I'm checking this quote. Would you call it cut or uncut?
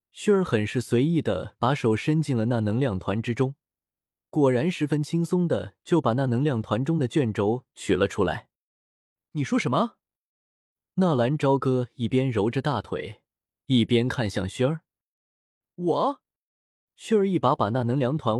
cut